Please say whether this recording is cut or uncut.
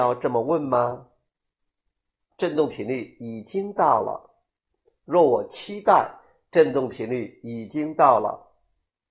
cut